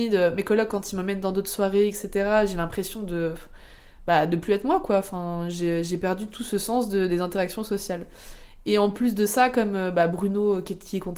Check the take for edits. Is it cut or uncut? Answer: uncut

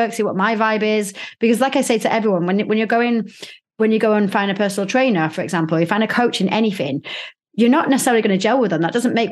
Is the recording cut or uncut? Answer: uncut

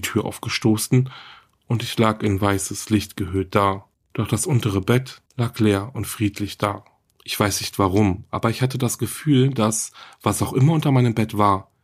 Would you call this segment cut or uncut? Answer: cut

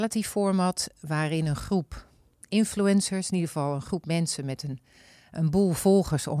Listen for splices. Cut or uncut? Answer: uncut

